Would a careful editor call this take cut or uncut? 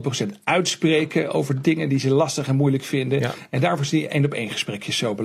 uncut